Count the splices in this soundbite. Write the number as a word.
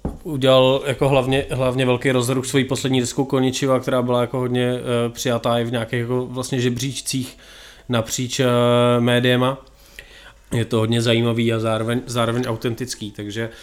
one